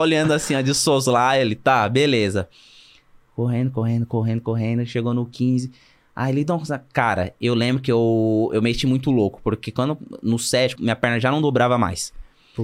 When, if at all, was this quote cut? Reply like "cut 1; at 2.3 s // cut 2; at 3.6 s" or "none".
cut 1; at 10.8 s